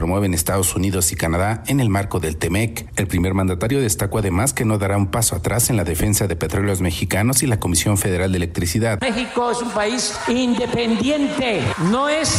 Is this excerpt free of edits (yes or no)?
yes